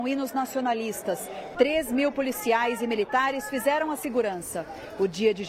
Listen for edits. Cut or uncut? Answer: uncut